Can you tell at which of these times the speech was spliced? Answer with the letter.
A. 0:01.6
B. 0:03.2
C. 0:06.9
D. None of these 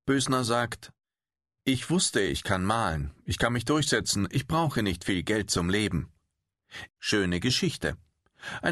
C